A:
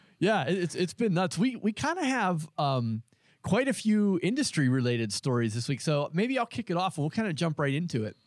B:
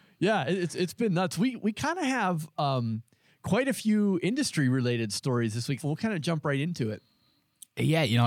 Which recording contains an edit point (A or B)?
B